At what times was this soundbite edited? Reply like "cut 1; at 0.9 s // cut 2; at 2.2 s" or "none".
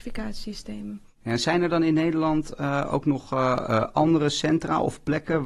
none

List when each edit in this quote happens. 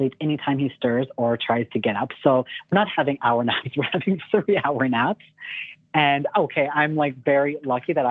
none

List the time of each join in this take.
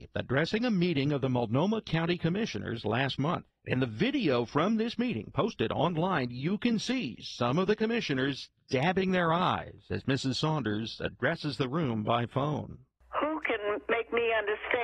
cut 1; at 3.5 s

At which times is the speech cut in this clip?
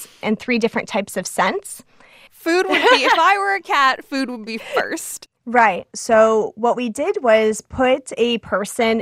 cut 1; at 2.3 s // cut 2; at 5.3 s

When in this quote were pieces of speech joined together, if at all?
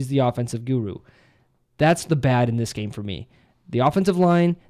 none

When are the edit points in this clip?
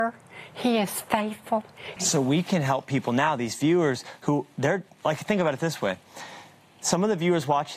cut 1; at 2.0 s

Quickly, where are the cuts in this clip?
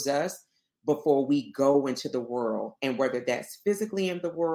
none

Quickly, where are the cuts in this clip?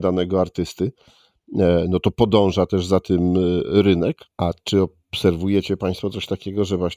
cut 1; at 4.3 s

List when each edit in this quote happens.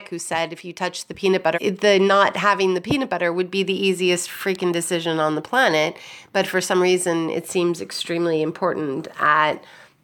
cut 1; at 1.5 s

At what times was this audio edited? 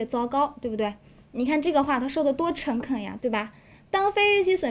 cut 1; at 1.2 s // cut 2; at 3.2 s

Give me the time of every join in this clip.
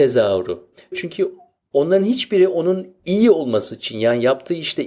cut 1; at 0.9 s

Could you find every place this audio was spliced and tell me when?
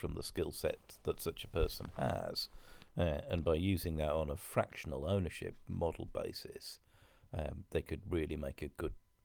none

